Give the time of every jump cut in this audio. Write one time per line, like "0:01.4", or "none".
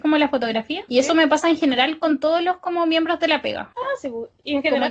none